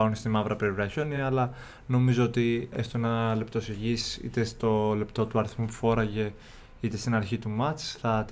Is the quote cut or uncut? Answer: uncut